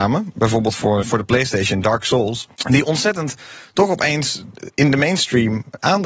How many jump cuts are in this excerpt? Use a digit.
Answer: 2